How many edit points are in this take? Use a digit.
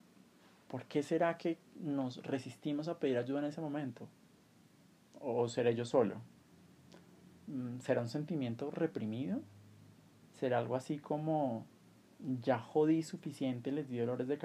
0